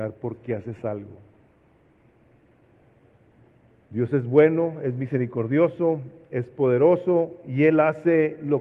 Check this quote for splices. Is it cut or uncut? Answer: uncut